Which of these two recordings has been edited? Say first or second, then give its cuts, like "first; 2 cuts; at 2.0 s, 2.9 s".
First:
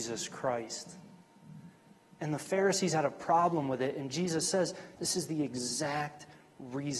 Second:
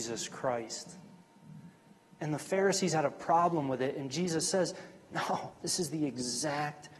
first; 1 cut; at 5.0 s